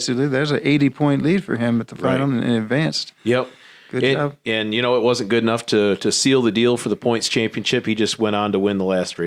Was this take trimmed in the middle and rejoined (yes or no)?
no